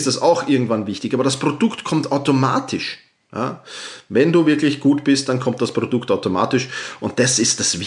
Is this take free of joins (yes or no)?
yes